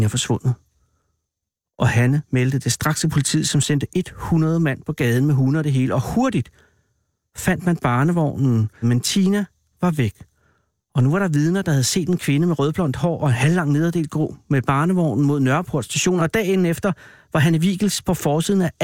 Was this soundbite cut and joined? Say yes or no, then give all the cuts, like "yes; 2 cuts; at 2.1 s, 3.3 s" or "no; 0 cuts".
yes; 2 cuts; at 8.8 s, 16.2 s